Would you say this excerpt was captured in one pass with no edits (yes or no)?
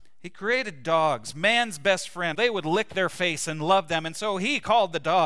no